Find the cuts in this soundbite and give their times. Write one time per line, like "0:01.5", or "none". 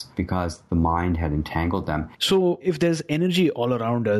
0:02.1